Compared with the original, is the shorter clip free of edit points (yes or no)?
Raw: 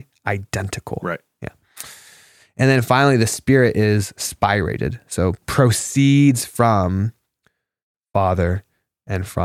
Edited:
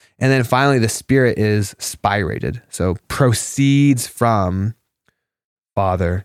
yes